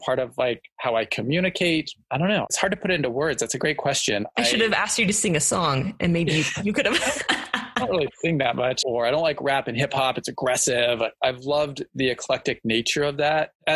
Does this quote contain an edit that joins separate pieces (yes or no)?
yes